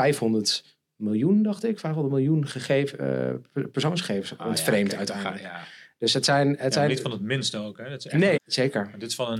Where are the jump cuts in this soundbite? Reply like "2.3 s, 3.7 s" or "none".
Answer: 4.4 s, 8.4 s